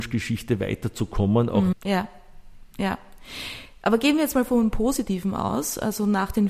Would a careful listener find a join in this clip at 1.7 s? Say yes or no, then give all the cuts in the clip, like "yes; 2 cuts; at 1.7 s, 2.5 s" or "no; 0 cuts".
yes; 1 cut; at 1.7 s